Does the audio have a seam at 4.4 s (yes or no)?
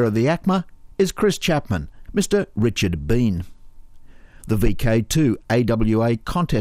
yes